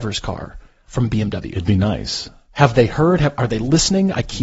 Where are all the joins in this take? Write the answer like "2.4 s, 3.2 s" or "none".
none